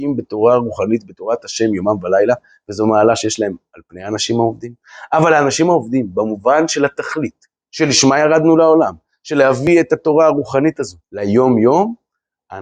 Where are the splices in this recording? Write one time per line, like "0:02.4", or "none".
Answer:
0:11.0